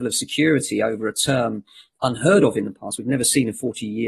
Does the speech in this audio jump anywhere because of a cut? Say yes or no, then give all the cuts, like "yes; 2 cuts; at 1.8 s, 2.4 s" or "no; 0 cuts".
no; 0 cuts